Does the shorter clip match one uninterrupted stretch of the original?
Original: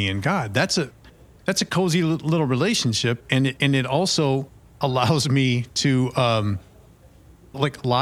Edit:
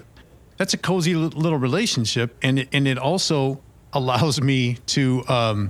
yes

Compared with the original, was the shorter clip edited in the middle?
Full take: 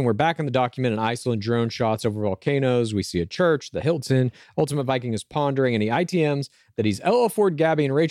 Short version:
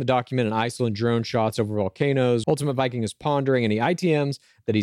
yes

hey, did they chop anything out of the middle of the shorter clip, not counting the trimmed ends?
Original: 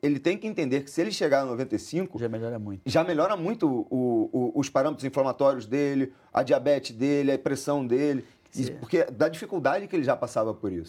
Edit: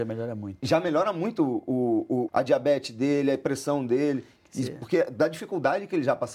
yes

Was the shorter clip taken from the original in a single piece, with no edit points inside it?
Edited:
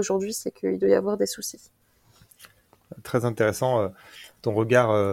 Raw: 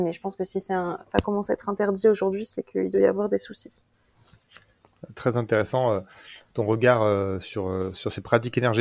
yes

